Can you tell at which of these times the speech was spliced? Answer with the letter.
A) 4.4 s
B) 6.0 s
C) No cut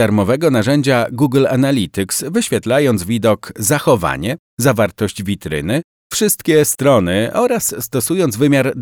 C